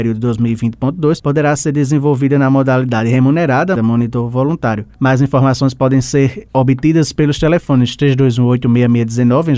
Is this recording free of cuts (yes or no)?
no